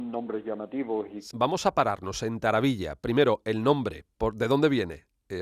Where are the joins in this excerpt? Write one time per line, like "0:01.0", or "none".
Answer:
0:01.3